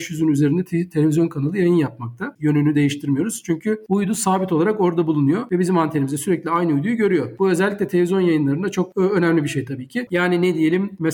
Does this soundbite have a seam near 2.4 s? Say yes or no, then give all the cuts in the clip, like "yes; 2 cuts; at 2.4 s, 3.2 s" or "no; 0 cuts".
yes; 2 cuts; at 2.4 s, 10.1 s